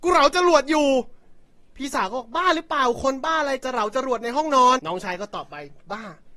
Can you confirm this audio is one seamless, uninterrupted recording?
no; 1 cut; at 4.8 s

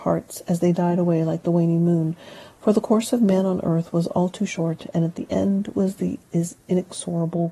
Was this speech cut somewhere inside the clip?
no; 0 cuts

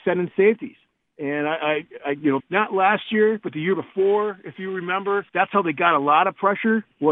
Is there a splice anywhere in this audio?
yes; 2 cuts; at 2.4 s, 5.3 s

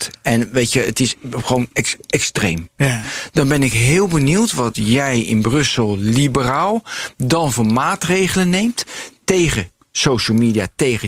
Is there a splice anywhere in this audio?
no; 0 cuts

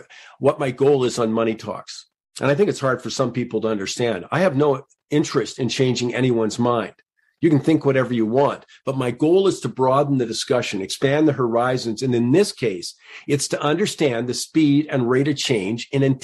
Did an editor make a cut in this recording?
no; 0 cuts

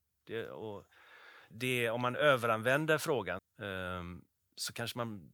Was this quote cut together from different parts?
yes; 2 cuts; at 1.5 s, 3.4 s

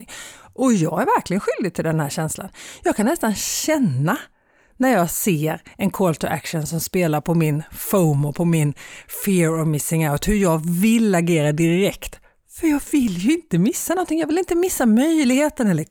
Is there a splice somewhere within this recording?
no; 0 cuts

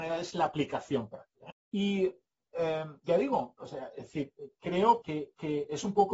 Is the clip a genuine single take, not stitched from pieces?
no; 2 cuts; at 1.5 s, 5.0 s

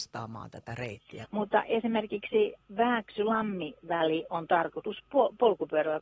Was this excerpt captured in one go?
no; 1 cut; at 1.2 s

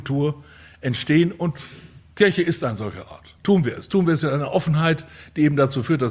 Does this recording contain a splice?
yes; 1 cut; at 3.4 s

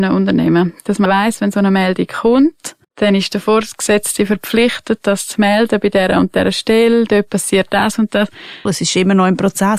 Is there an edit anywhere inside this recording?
yes; 3 cuts; at 1.1 s, 2.8 s, 8.7 s

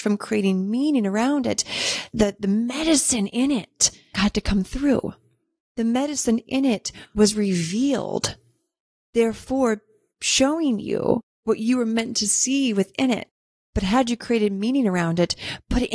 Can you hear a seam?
no; 0 cuts

